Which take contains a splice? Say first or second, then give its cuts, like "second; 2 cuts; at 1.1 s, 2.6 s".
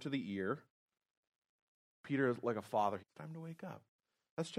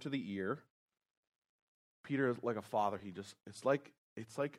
first; 1 cut; at 3.0 s